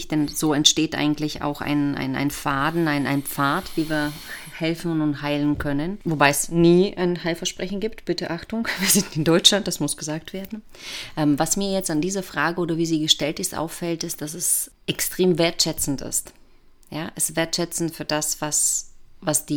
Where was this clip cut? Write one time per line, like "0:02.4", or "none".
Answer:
none

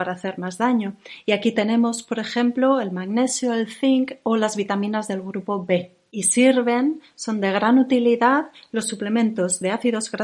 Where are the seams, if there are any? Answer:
none

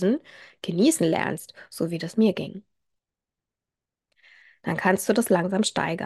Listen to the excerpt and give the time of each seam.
none

